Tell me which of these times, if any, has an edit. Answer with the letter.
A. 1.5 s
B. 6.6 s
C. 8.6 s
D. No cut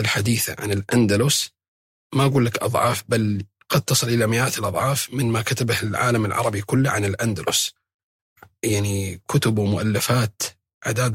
D